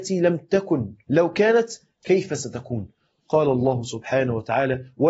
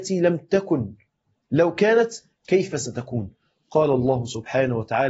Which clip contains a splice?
first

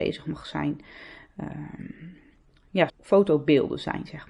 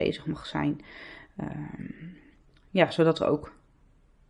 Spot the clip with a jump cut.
first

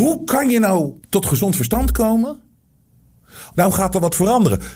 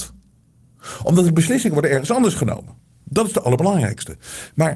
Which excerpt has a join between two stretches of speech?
first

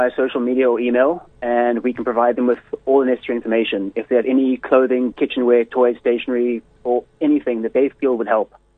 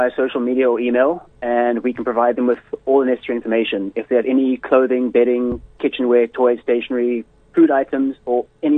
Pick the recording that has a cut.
first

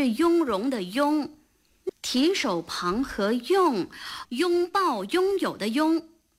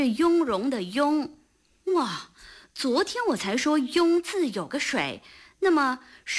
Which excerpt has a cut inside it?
first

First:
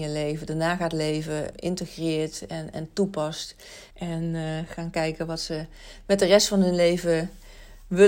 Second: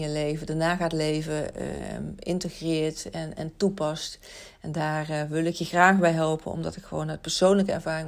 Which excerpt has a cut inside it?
first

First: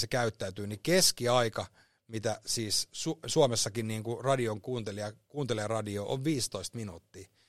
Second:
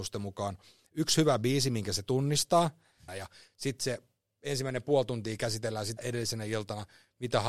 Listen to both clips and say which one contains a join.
second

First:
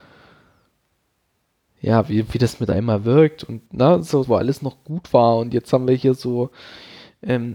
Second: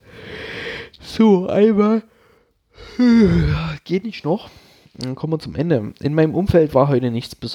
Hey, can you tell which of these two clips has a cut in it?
first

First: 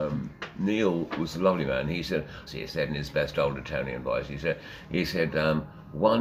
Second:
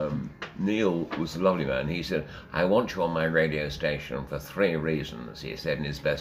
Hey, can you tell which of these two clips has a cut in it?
first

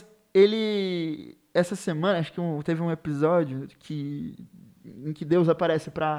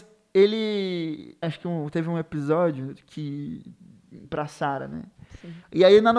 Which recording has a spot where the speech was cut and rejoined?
second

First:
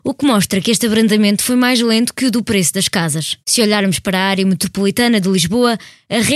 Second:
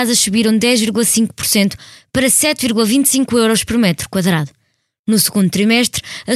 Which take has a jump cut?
first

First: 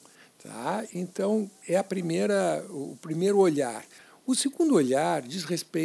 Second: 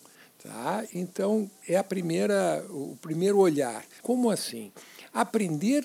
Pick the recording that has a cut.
second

